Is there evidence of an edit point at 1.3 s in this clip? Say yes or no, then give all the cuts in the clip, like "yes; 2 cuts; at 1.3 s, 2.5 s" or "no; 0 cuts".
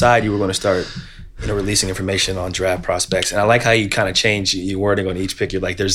no; 0 cuts